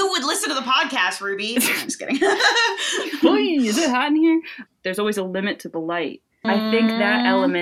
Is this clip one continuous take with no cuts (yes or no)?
no